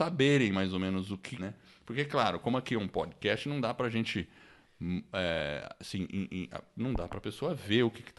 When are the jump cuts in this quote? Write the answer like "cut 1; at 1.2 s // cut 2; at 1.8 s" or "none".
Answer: cut 1; at 1.4 s